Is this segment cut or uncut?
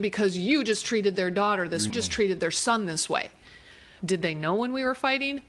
cut